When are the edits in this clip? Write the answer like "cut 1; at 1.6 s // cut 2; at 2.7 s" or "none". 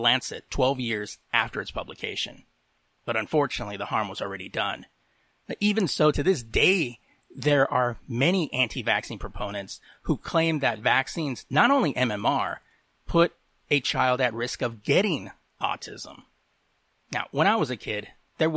none